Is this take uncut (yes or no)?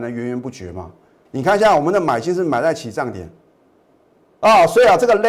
no